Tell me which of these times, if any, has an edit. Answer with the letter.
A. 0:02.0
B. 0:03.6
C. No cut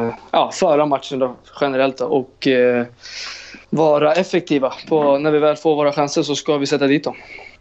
B